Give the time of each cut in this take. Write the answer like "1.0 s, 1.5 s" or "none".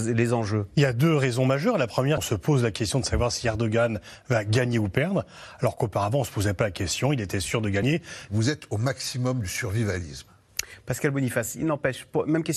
2.2 s, 8.3 s